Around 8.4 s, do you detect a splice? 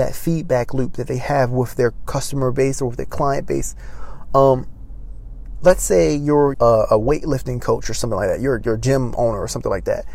no; 1 cut; at 6.5 s

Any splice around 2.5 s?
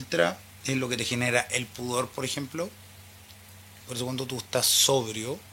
no; 1 cut; at 3.8 s

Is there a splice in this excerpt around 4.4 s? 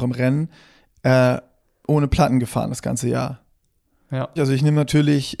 yes; 1 cut; at 4.4 s

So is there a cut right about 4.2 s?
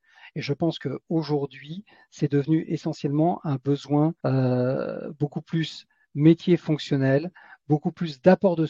yes; 1 cut; at 4.2 s

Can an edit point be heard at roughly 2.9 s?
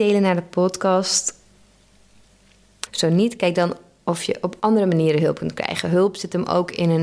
yes; 1 cut; at 2.9 s

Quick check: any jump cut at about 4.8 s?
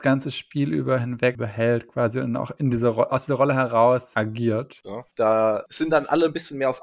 yes; 1 cut; at 4.8 s

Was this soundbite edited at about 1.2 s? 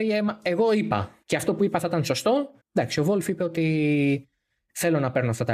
yes; 2 cuts; at 1.2 s, 2.6 s

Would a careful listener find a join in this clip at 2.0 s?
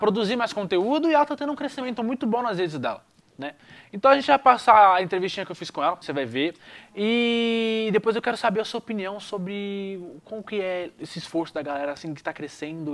no; 1 cut; at 6.0 s

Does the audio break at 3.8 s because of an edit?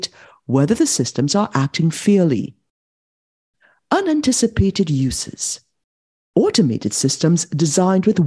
no; 0 cuts

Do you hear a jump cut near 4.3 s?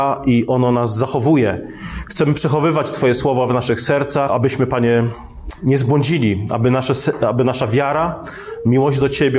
yes; 1 cut; at 4.3 s

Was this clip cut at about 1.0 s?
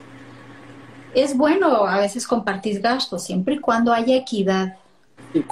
no; 0 cuts

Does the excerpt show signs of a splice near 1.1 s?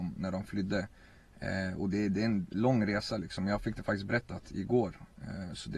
no; 0 cuts

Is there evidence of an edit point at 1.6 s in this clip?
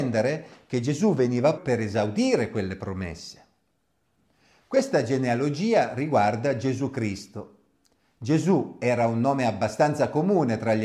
yes; 1 cut; at 1.6 s

